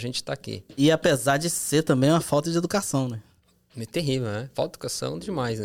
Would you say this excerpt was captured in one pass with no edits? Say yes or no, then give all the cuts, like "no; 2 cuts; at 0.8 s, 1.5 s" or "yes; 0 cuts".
yes; 0 cuts